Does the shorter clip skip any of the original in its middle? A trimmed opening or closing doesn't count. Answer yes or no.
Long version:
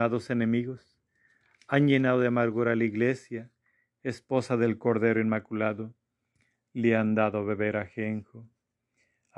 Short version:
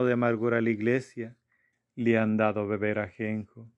yes